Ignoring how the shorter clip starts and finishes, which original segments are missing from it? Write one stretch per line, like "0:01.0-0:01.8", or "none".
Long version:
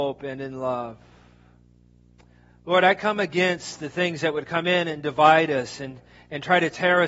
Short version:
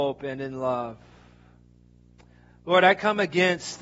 none